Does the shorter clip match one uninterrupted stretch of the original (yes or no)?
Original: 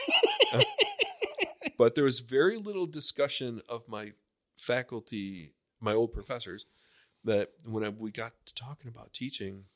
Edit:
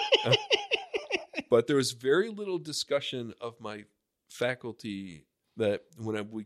no